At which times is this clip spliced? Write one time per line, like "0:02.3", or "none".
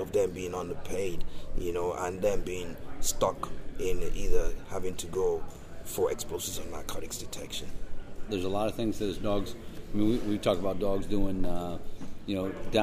0:08.3